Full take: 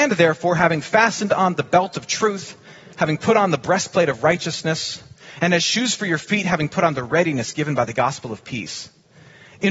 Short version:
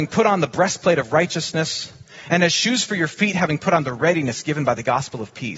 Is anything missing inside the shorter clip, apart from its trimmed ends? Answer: no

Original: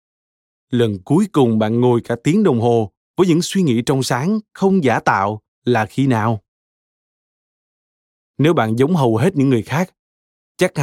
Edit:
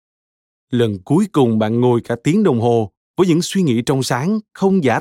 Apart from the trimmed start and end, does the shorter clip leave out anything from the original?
no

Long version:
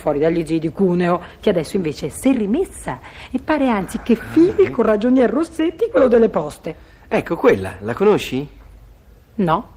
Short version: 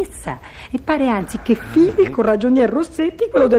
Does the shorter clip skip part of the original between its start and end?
no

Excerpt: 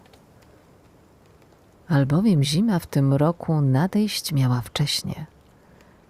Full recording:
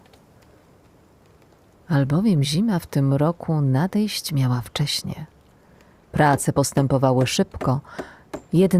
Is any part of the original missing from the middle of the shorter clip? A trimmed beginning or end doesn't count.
no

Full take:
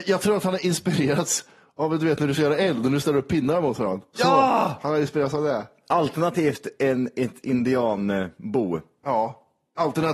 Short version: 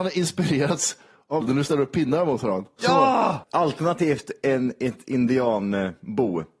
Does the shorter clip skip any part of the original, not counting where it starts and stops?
yes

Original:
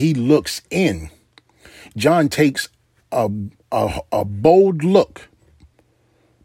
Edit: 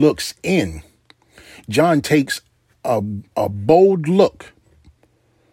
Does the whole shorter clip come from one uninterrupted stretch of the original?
no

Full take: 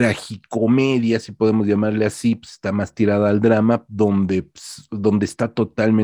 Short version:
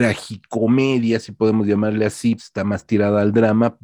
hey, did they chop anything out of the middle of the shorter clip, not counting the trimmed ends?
yes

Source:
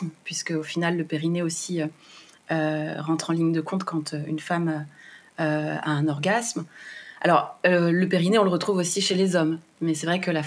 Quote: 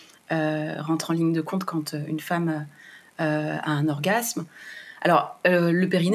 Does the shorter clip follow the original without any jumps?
yes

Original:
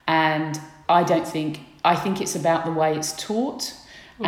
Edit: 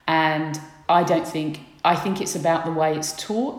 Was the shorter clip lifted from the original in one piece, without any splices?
yes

